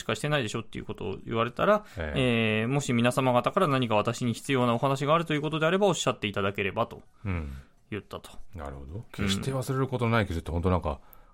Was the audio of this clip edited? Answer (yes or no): yes